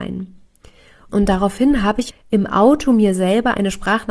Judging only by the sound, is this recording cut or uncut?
cut